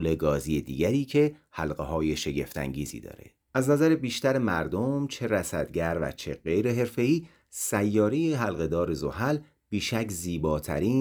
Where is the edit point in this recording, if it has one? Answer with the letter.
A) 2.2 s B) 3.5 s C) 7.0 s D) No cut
B